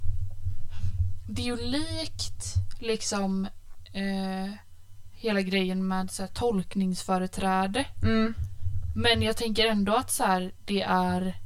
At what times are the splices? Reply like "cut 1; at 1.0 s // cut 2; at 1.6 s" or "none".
none